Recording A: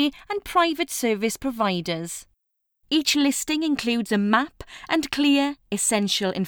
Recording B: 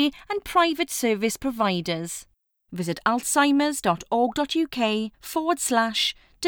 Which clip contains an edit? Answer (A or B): B